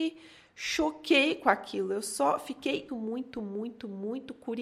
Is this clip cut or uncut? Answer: cut